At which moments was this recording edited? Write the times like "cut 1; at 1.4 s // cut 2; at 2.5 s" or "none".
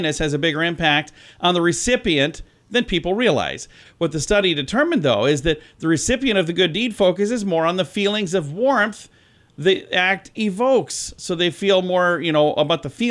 cut 1; at 3.8 s